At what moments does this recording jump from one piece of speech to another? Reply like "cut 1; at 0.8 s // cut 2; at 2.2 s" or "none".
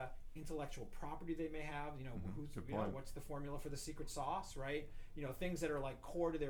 none